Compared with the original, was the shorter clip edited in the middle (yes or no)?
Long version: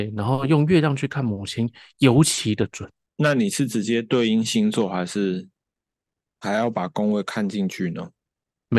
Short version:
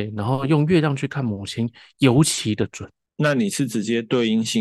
no